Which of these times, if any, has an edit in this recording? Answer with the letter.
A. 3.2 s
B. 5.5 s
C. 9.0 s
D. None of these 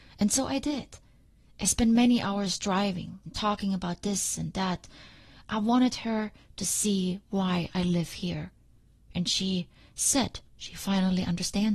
A